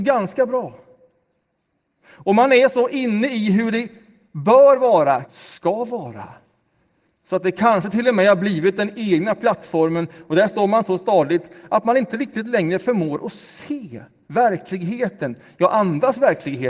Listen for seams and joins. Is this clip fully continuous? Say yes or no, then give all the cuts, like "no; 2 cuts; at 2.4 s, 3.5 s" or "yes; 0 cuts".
no; 1 cut; at 5.2 s